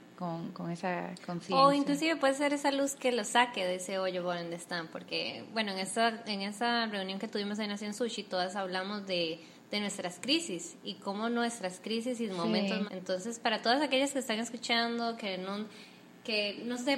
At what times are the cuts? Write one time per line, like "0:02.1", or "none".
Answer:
0:12.9

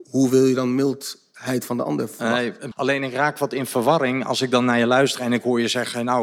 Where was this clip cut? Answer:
0:02.7

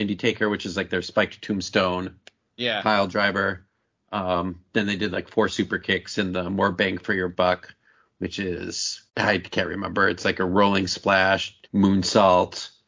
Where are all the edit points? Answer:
0:09.1
0:11.6

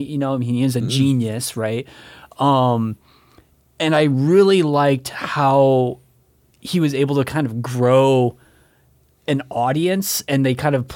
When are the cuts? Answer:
none

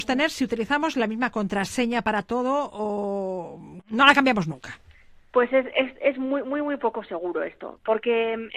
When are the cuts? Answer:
none

